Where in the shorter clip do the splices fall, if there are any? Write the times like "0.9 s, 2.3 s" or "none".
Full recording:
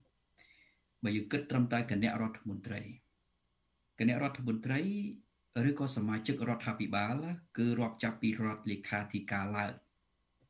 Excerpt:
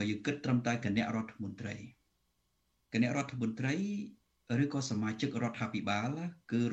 none